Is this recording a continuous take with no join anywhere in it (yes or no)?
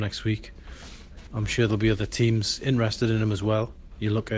no